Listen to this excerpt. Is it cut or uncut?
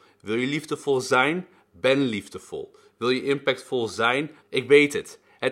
cut